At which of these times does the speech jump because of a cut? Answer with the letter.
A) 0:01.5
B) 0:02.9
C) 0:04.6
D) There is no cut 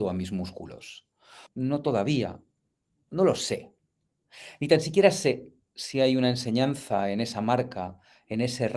A